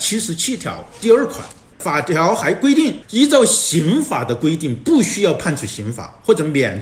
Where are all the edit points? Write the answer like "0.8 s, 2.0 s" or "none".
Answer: 1.7 s